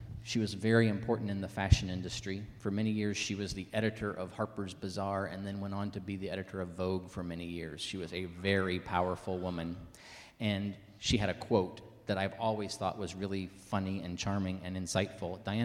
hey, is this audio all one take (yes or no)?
yes